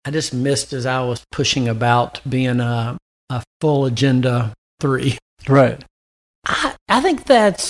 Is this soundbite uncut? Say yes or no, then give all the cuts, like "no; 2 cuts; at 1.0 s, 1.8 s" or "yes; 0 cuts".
no; 1 cut; at 6.3 s